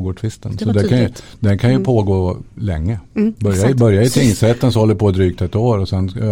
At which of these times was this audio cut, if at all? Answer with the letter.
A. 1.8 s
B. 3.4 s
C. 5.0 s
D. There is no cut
D